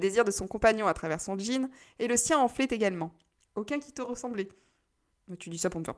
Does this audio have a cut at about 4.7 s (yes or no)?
no